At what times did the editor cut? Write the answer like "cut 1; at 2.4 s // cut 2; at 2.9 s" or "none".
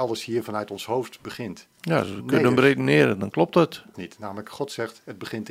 cut 1; at 3.9 s